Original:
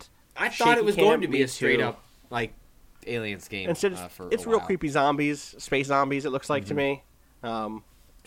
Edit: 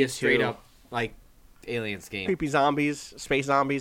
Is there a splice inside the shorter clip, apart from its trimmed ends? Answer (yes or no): yes